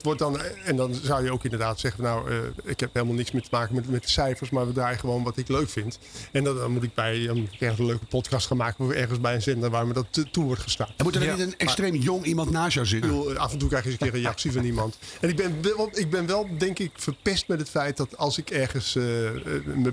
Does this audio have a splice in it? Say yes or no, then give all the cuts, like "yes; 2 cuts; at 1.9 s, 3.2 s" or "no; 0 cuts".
yes; 1 cut; at 13.0 s